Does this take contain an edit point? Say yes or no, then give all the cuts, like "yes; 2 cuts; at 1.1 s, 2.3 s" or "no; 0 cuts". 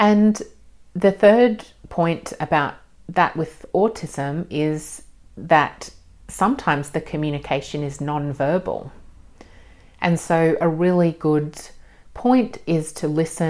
no; 0 cuts